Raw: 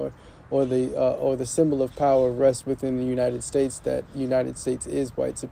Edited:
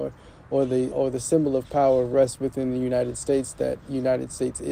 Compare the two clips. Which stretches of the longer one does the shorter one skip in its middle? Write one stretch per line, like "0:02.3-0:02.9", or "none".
0:00.9-0:01.2